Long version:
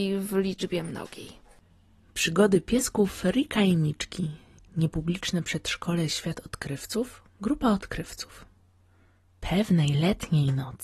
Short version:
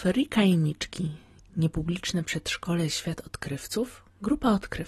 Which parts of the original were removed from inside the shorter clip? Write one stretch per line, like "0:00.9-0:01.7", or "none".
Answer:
none